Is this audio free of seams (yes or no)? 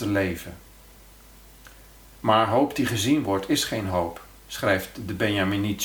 yes